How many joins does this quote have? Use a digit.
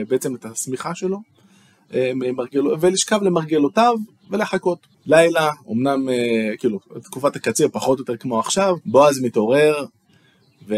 2